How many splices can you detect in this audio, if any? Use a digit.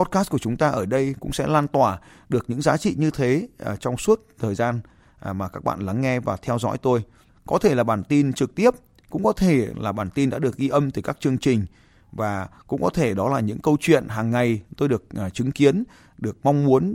1